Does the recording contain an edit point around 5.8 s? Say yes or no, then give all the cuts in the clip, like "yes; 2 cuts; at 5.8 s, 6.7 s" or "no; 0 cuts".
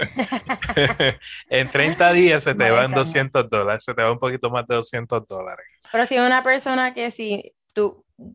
no; 0 cuts